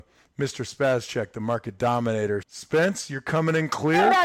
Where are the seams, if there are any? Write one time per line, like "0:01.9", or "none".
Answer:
0:02.4